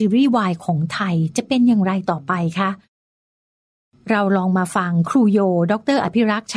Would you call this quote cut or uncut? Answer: uncut